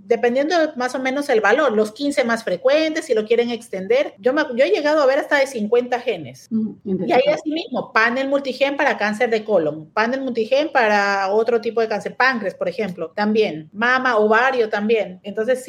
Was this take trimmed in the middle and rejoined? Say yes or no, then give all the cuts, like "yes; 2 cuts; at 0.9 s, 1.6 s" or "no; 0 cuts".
no; 0 cuts